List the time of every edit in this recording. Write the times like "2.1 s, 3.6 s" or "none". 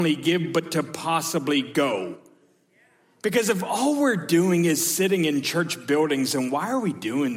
none